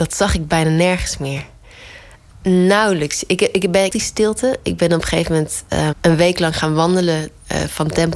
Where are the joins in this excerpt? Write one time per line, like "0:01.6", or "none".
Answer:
0:02.3
0:03.9
0:05.9